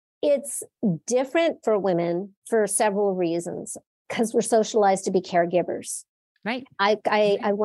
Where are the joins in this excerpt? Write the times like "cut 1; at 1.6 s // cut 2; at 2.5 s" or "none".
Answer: cut 1; at 2.4 s